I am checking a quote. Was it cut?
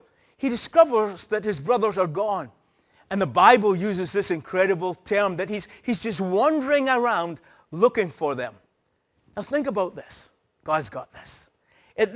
no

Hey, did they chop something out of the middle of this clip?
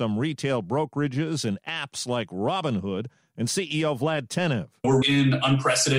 yes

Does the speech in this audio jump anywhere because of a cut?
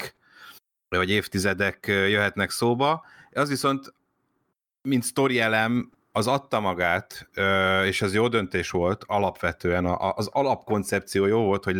no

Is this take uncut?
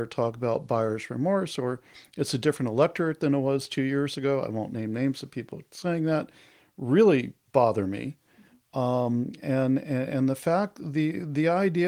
yes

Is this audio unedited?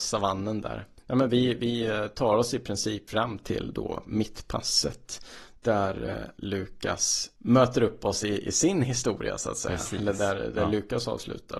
yes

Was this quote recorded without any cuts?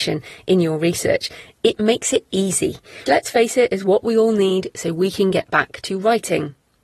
no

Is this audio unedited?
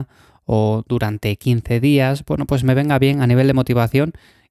yes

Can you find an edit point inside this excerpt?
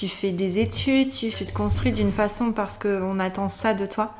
yes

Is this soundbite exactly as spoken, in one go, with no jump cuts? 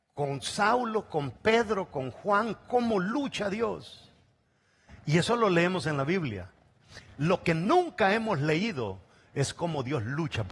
yes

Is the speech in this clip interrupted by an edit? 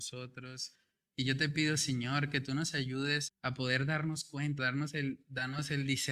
yes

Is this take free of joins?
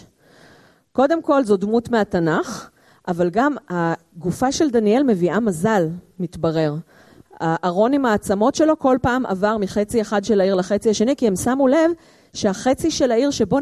yes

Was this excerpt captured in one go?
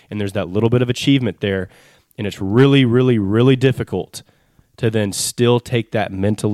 yes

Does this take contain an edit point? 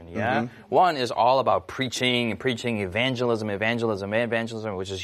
no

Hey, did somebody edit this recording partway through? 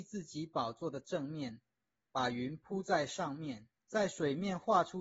yes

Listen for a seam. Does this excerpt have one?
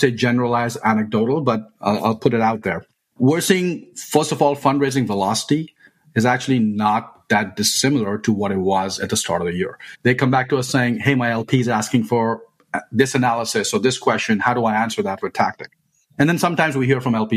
yes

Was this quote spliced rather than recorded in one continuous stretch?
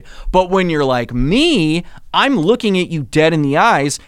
no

